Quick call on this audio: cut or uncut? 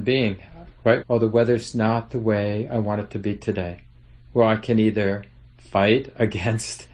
cut